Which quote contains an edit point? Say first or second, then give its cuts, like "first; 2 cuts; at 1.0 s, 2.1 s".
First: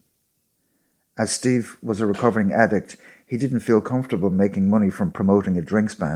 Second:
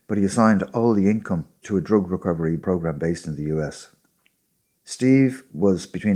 second; 1 cut; at 4.7 s